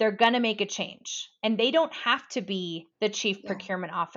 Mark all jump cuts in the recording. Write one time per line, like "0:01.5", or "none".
0:02.9